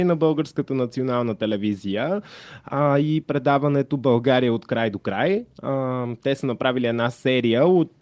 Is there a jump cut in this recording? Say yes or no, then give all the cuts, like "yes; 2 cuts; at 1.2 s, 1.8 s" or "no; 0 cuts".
no; 0 cuts